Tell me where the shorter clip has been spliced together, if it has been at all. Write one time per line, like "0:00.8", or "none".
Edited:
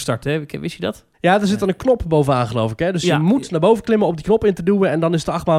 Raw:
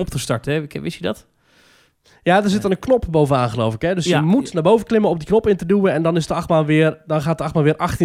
0:01.1